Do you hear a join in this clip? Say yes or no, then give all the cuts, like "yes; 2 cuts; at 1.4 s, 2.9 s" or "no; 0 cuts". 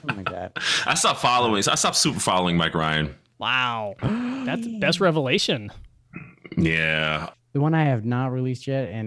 yes; 1 cut; at 7.3 s